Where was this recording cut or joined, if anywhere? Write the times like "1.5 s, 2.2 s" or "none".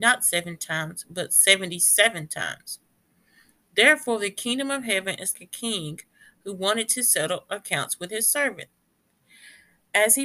5.3 s